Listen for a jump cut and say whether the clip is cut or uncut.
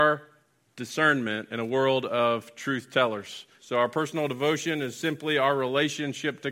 cut